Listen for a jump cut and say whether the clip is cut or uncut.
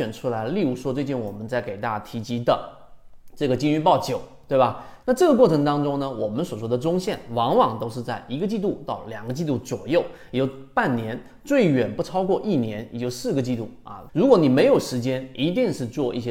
cut